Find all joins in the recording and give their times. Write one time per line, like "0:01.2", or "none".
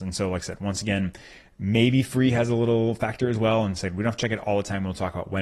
none

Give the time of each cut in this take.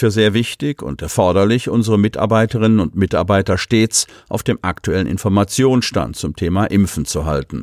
none

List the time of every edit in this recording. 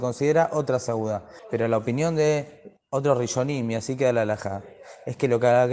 0:01.4

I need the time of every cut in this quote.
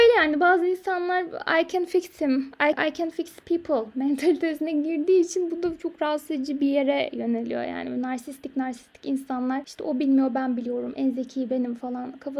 0:02.7

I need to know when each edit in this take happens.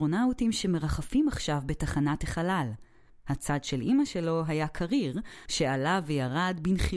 0:03.1
0:05.5

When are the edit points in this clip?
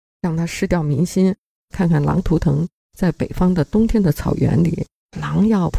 0:01.5

